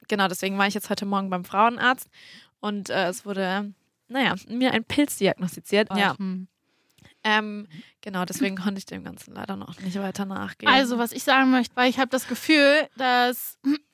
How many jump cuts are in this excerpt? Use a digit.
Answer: 2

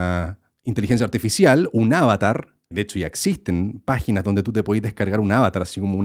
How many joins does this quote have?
1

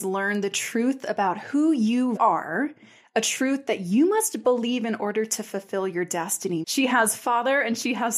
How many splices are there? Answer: 2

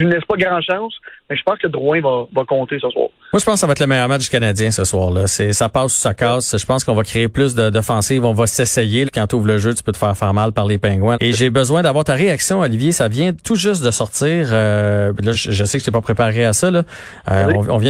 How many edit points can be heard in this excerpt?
3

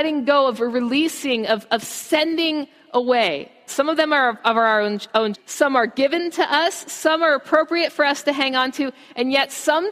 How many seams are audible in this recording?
2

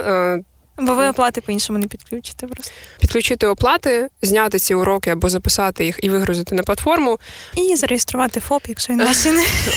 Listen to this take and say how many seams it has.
2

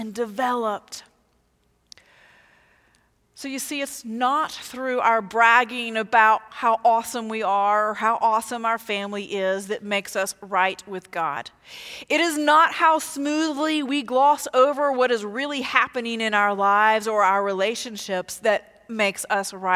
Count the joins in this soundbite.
0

